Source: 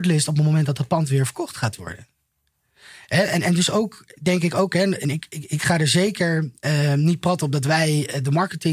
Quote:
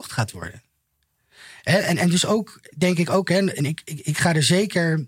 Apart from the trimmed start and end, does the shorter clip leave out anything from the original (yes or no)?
no